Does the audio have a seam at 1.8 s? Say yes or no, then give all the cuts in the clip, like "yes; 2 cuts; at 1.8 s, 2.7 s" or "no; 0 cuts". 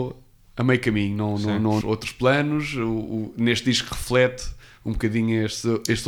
yes; 1 cut; at 1.8 s